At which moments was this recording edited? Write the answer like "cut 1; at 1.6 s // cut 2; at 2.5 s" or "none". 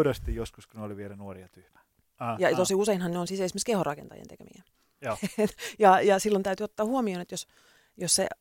cut 1; at 2.0 s